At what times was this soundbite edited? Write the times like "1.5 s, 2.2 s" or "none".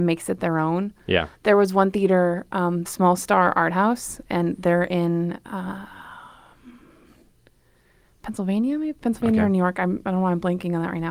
2.8 s